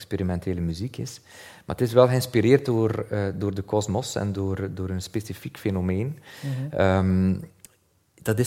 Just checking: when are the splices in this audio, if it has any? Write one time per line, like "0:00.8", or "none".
none